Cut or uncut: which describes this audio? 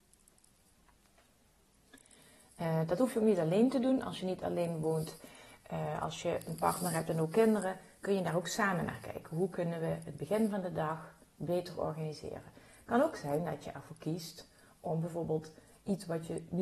uncut